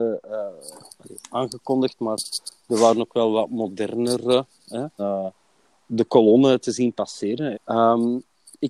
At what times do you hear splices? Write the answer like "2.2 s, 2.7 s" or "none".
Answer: 5.0 s, 7.5 s